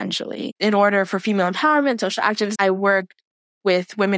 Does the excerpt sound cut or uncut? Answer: cut